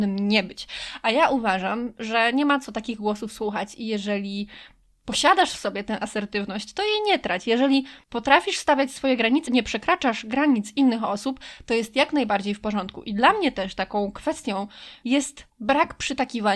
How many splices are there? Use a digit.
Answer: 2